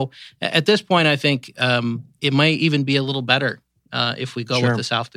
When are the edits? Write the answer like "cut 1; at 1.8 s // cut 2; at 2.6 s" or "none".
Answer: cut 1; at 2.2 s